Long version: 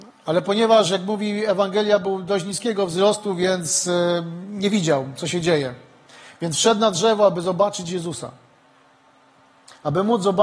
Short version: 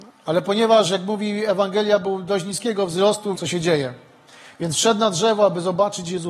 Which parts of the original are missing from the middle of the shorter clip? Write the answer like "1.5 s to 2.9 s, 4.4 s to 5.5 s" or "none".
3.4 s to 5.2 s

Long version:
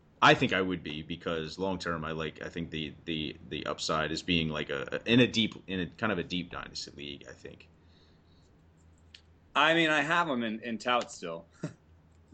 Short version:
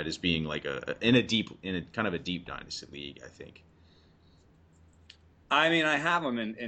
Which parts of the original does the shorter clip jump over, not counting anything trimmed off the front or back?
none

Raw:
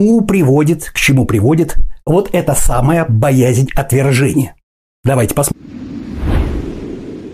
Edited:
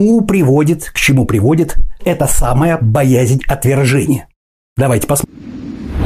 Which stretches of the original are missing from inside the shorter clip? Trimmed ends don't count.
2.0 s to 2.3 s

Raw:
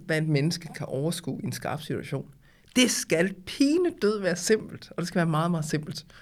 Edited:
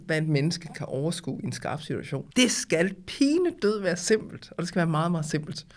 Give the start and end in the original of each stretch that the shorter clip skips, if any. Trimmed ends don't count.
2.3 s to 2.7 s

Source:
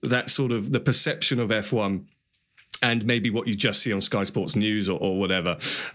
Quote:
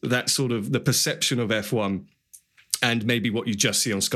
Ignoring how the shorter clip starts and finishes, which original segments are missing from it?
none

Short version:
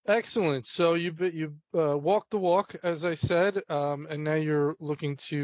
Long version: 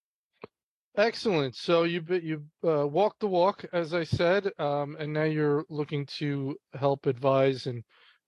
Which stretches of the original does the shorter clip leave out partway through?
none

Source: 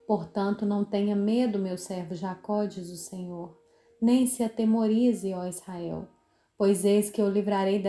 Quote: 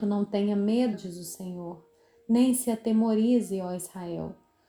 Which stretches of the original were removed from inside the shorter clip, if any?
1.5 s to 2.7 s

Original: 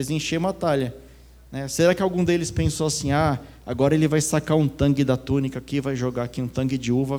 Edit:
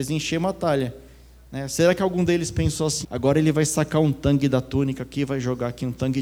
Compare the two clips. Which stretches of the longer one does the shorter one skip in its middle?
3.0 s to 3.6 s

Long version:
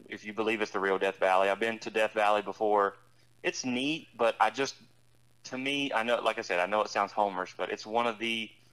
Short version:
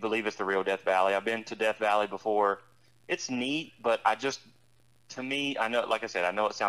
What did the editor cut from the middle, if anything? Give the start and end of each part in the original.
none

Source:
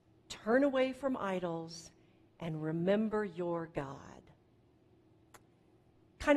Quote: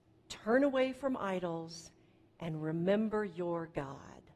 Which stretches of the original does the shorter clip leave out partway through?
none

